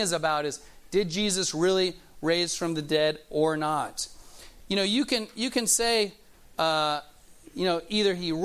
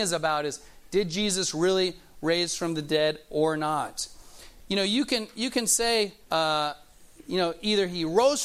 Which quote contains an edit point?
second; 1 cut; at 6.2 s

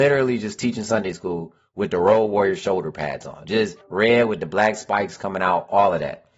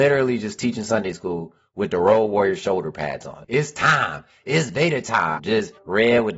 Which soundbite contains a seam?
second; 2 cuts; at 3.4 s, 5.4 s

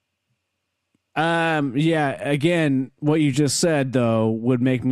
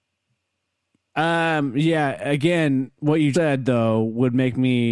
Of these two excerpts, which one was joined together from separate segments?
second; 1 cut; at 3.3 s

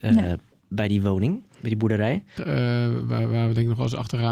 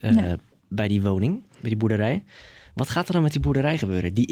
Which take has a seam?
first; 1 cut; at 2.4 s

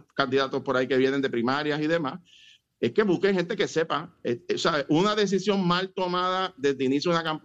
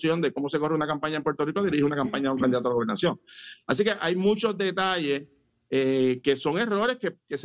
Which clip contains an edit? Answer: first; 1 cut; at 4.5 s

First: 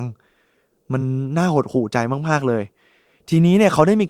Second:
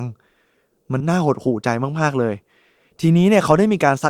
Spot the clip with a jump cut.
second; 1 cut; at 1.0 s

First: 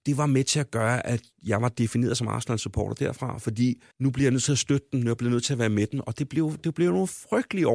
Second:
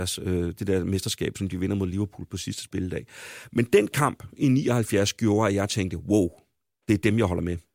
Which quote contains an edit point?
first; 1 cut; at 3.9 s

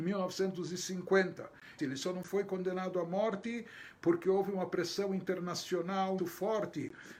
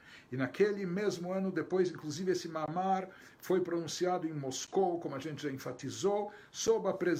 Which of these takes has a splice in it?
first; 2 cuts; at 1.8 s, 6.2 s

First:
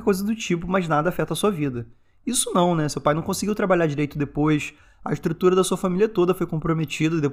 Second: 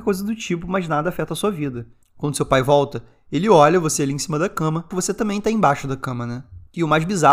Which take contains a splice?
second; 2 cuts; at 2.0 s, 4.9 s

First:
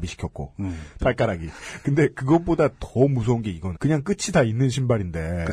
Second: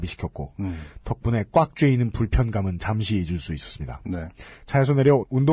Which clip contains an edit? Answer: first; 2 cuts; at 1.0 s, 3.7 s

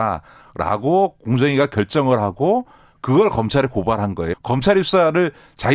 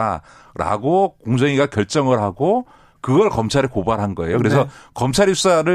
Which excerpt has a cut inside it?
first; 1 cut; at 4.3 s

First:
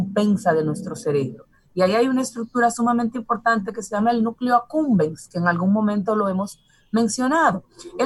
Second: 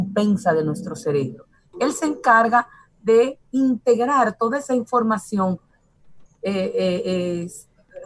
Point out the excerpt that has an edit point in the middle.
second; 2 cuts; at 1.7 s, 6.3 s

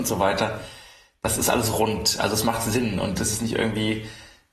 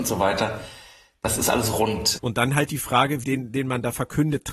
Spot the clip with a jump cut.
second; 2 cuts; at 2.2 s, 3.2 s

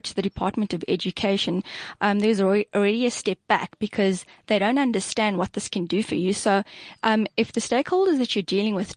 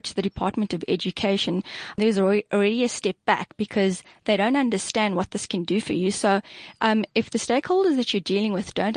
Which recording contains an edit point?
second; 1 cut; at 2.0 s

